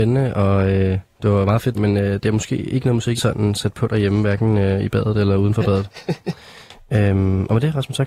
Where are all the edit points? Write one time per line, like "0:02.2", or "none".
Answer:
0:01.7
0:03.2